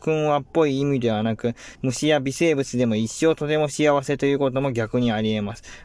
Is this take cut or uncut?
cut